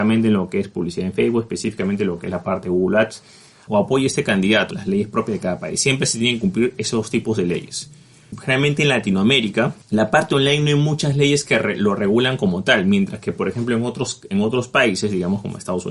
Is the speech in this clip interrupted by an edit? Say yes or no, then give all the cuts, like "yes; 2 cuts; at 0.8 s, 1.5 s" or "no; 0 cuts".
yes; 2 cuts; at 3.7 s, 4.7 s